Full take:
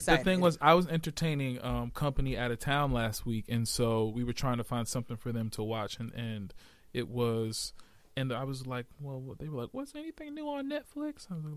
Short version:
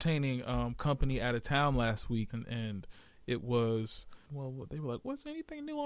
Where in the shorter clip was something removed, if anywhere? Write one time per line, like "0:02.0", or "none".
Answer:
0:02.3
0:04.3